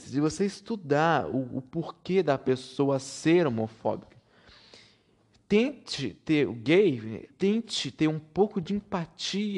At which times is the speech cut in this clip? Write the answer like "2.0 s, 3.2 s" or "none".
7.3 s